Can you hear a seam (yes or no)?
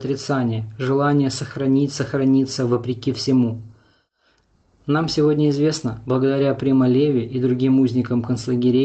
no